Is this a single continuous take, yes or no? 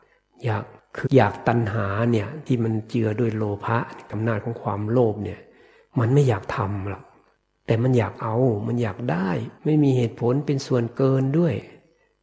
no